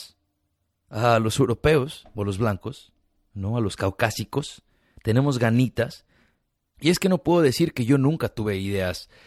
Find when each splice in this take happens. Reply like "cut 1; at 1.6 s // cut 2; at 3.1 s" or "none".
none